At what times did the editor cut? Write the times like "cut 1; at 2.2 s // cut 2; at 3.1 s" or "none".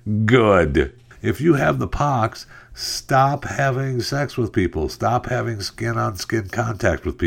cut 1; at 1.1 s

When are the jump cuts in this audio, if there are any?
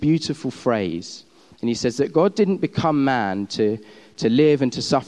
none

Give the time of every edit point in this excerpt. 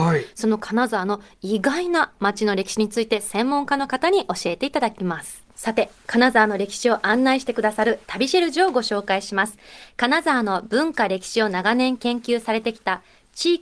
cut 1; at 5.5 s

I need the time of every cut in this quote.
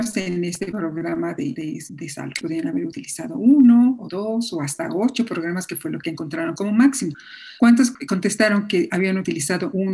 cut 1; at 2.4 s

